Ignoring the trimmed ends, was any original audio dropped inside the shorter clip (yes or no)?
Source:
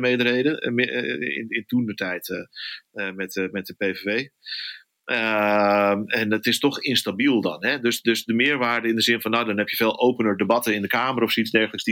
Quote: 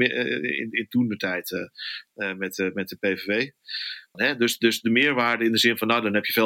yes